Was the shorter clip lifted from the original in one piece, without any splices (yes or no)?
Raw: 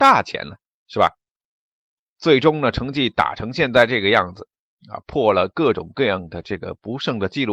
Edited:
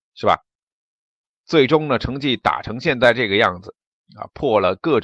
yes